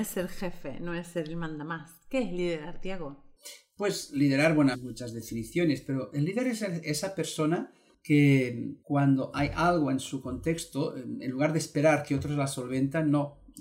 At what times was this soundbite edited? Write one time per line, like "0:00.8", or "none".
0:04.7
0:08.8